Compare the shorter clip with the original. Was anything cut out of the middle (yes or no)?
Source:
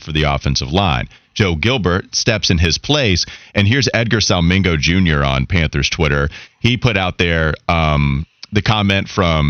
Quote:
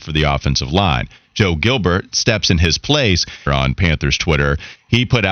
yes